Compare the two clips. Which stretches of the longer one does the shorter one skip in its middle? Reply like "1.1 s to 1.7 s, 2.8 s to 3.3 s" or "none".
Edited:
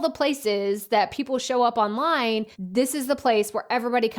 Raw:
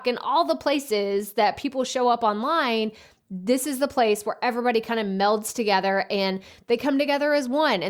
3.0 s to 3.2 s